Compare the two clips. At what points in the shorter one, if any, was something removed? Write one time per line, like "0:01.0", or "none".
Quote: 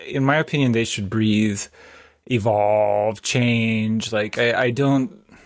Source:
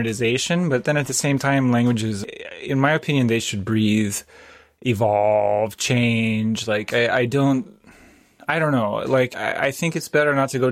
none